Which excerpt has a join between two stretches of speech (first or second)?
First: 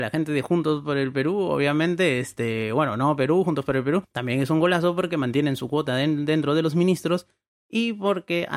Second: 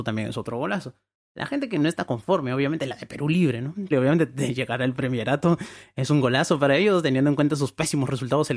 second